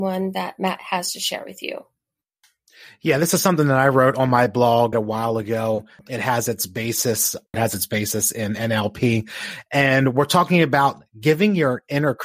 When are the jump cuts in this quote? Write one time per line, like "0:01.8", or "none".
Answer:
0:04.9
0:07.5